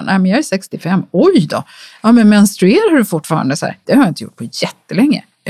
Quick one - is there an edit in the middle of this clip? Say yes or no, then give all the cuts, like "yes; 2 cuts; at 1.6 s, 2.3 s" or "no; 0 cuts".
yes; 1 cut; at 3.8 s